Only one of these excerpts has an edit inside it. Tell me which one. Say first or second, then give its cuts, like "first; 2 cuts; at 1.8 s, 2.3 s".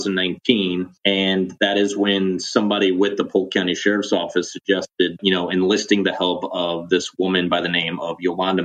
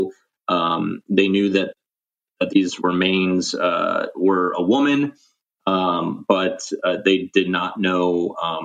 first; 2 cuts; at 1.0 s, 5.2 s